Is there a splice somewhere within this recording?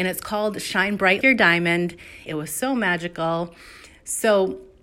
yes; 2 cuts; at 1.2 s, 2.3 s

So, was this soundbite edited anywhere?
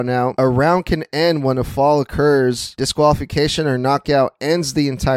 no; 0 cuts

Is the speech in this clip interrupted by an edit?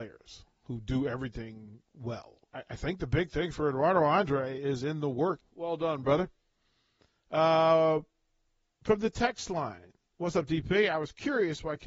yes; 2 cuts; at 2.5 s, 5.4 s

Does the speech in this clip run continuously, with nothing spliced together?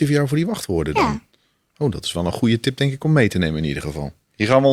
yes; 0 cuts

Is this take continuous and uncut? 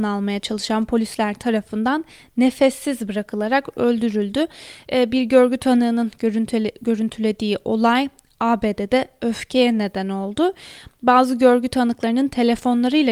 yes; 0 cuts

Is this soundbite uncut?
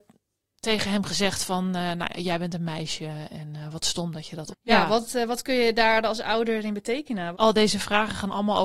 no; 2 cuts; at 4.5 s, 7.3 s

